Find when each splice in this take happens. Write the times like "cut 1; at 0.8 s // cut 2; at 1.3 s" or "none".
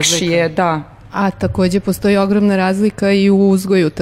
none